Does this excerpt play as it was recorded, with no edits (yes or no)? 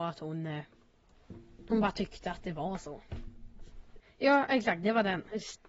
no